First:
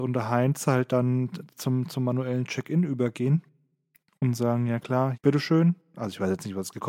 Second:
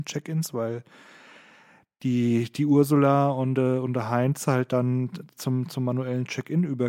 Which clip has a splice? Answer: first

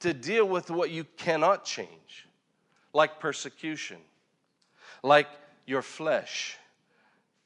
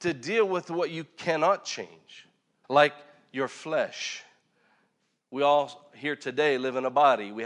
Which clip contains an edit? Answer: second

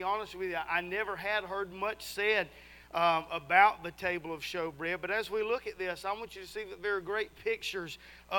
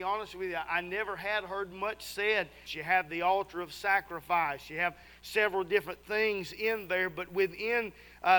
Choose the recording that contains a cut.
second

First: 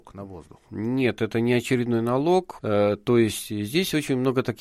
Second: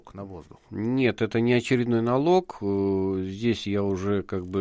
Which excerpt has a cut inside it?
first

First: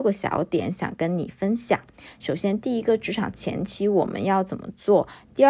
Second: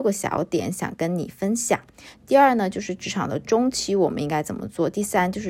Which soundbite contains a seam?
second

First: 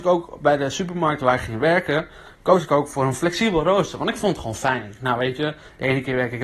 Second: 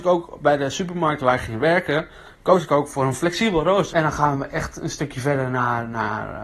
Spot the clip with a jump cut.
second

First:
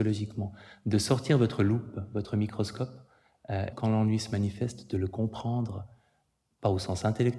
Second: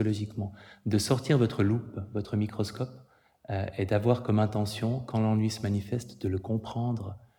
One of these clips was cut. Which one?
first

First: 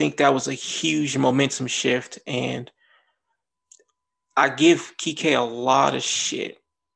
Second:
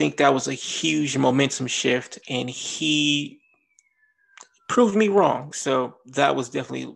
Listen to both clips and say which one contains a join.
second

